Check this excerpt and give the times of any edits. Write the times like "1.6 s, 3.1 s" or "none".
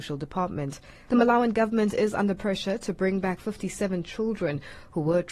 1.1 s